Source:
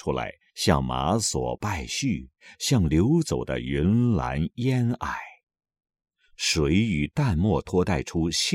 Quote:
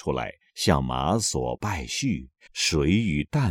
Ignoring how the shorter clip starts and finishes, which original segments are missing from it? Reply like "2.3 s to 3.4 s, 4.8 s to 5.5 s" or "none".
2.5 s to 6.3 s